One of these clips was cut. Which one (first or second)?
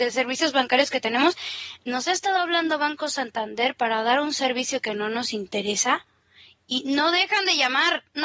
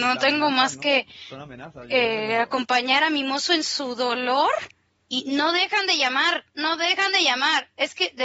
second